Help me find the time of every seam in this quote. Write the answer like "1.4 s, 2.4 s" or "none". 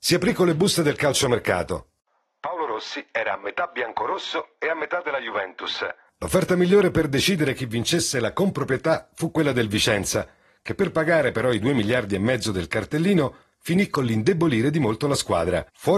none

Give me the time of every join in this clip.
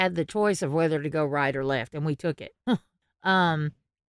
2.7 s

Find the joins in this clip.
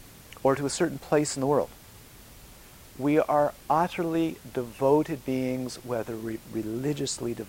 none

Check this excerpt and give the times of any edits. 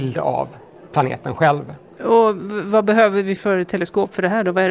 2.0 s, 3.4 s

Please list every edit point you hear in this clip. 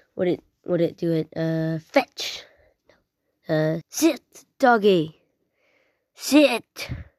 3.8 s

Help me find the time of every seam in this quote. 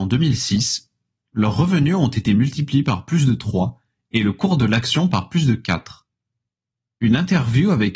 none

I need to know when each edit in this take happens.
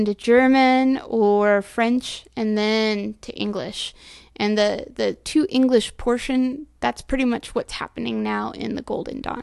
none

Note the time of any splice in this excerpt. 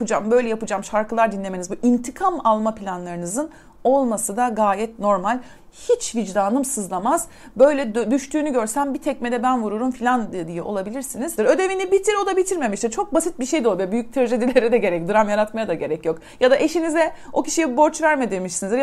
11.4 s

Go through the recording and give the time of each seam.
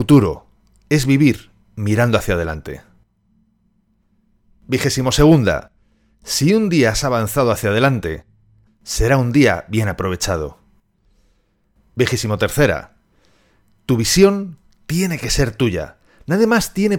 8.7 s

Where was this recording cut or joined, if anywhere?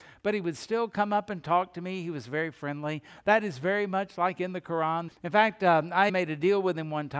5.1 s, 6.1 s

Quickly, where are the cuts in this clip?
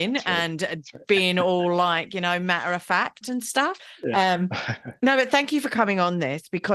3.8 s

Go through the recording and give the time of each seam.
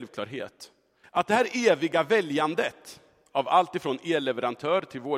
1.0 s

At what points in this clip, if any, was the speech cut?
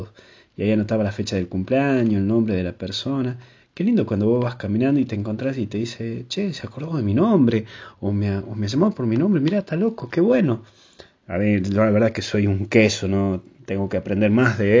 none

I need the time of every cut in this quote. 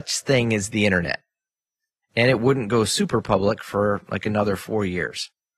2.0 s

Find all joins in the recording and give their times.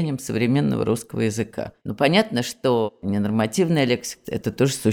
1.8 s

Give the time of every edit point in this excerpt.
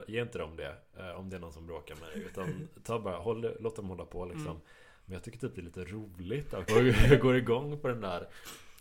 6.7 s

